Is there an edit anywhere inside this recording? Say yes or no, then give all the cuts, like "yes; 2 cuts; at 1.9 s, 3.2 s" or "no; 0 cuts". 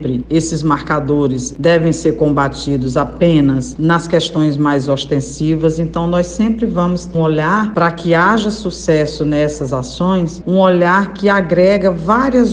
yes; 1 cut; at 7.1 s